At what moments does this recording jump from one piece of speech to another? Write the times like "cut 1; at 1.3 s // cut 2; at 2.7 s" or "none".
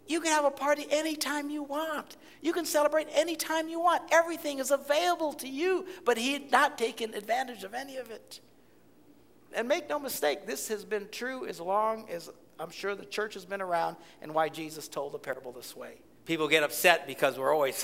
cut 1; at 9.5 s // cut 2; at 16.2 s

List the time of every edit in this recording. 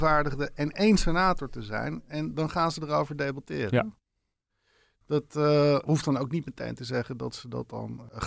none

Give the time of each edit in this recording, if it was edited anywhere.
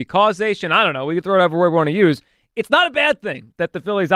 none

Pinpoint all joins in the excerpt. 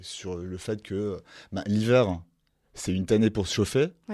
none

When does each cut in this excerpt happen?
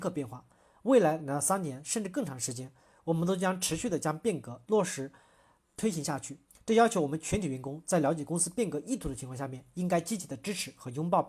none

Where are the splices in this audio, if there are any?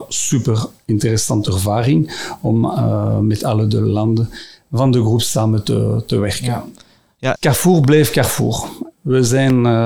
cut 1; at 7.4 s // cut 2; at 8.9 s

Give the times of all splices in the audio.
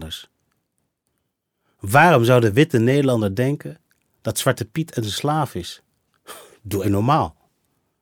cut 1; at 6.8 s

